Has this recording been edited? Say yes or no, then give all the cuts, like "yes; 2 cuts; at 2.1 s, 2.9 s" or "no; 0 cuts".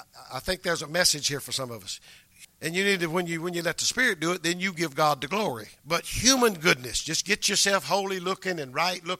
yes; 2 cuts; at 2.4 s, 5.8 s